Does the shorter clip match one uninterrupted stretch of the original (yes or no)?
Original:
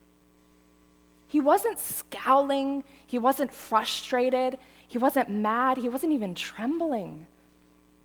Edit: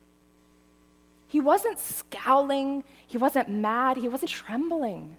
no